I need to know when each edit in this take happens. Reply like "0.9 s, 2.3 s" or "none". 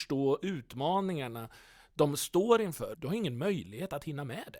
2.9 s